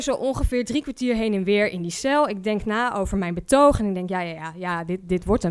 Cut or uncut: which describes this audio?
uncut